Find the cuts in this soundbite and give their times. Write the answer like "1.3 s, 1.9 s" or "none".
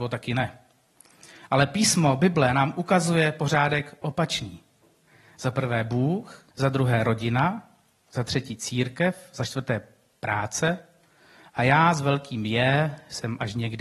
6.5 s